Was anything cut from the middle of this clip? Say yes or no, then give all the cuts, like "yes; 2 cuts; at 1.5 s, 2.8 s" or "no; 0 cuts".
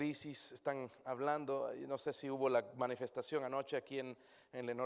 no; 0 cuts